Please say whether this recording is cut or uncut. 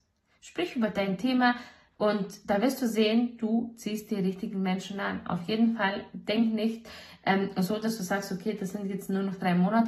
uncut